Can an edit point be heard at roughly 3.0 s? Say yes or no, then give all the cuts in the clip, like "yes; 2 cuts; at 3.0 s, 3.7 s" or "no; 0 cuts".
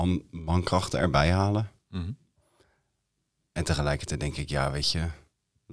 no; 0 cuts